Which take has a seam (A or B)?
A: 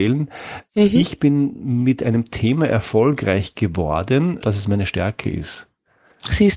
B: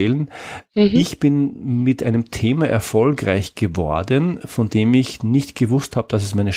A